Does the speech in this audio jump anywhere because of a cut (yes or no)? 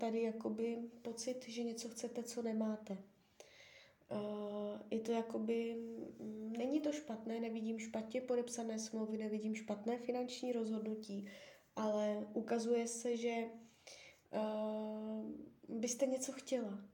no